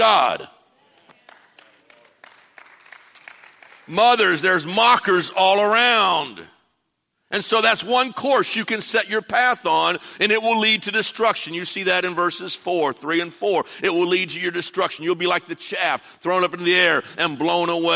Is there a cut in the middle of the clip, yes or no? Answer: no